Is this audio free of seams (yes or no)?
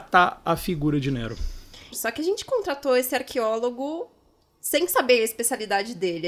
no